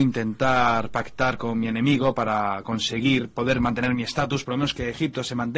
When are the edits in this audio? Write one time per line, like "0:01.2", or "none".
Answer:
0:04.4